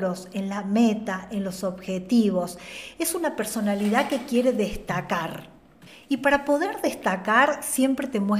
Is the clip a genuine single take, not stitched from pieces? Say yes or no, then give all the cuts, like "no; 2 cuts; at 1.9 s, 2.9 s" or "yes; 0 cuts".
yes; 0 cuts